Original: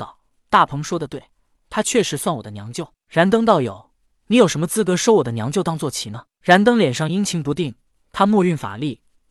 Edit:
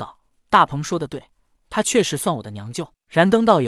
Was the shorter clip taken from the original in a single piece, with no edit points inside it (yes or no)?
yes